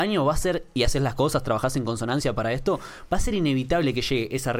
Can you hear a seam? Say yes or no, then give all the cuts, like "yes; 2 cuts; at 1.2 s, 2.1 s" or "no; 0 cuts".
no; 0 cuts